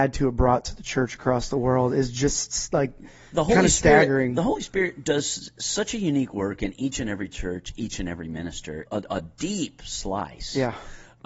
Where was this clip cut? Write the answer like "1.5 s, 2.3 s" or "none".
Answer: 8.9 s